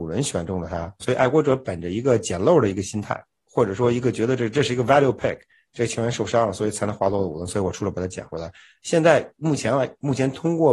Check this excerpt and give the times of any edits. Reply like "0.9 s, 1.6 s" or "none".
1.0 s